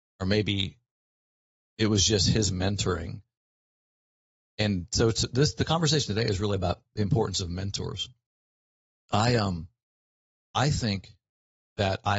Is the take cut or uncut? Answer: uncut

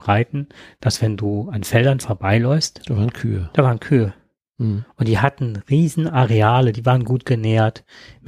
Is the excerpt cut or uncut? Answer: uncut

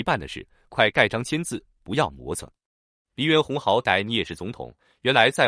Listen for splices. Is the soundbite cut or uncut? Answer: uncut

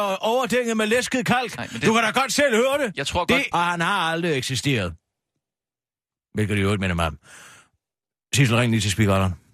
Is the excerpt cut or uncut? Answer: cut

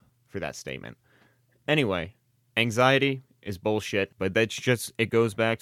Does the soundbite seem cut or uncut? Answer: cut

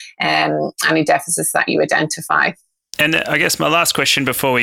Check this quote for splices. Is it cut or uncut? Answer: uncut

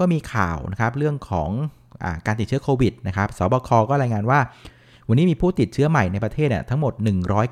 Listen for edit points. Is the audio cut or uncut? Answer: uncut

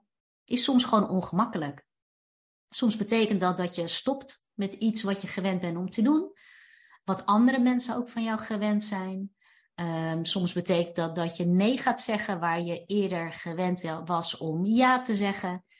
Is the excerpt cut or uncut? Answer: uncut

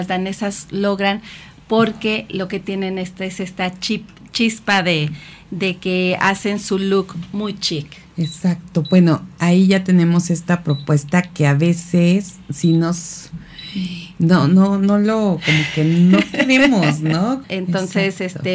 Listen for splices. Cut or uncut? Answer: cut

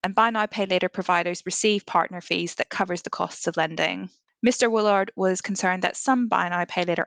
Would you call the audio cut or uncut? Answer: cut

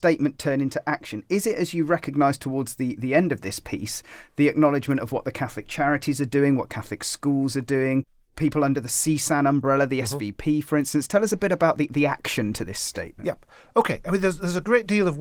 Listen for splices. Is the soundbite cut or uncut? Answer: uncut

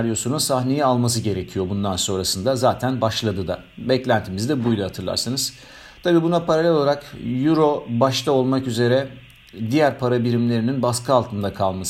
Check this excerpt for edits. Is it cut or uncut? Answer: uncut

